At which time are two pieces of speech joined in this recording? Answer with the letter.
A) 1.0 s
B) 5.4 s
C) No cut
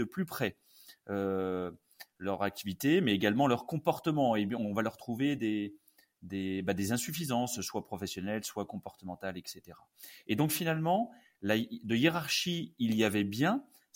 C